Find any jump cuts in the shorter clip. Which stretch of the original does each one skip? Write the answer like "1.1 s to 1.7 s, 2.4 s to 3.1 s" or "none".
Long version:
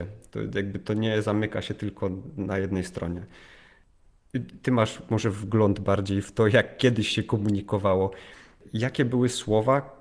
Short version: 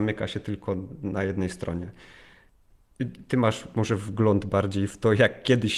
none